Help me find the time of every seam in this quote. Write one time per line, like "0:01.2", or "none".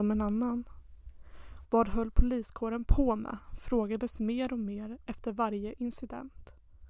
0:01.6